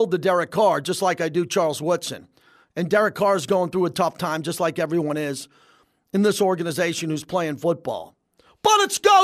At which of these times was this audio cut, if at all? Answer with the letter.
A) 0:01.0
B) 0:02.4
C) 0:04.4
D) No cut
D